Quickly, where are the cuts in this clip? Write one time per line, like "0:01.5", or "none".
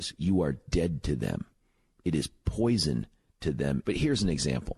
0:03.8